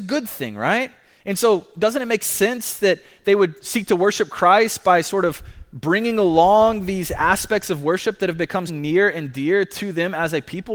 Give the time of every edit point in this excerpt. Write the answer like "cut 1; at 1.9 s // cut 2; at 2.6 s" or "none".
cut 1; at 1.2 s // cut 2; at 8.7 s